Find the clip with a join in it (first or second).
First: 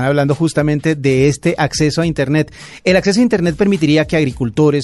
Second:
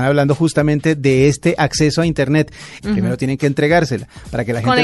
second